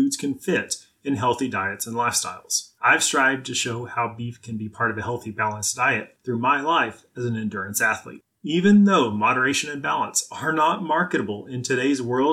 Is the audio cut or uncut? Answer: cut